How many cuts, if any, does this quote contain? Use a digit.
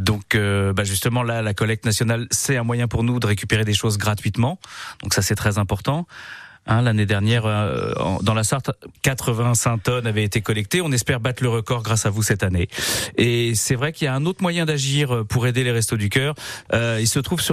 0